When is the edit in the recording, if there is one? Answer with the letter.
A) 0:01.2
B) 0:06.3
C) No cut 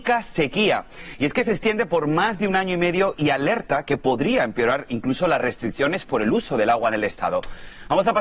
C